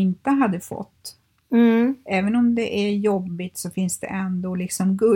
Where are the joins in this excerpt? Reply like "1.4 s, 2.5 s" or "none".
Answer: none